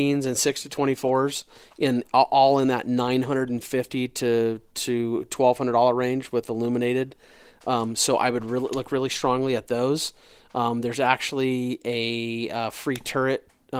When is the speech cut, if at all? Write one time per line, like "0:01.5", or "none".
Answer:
none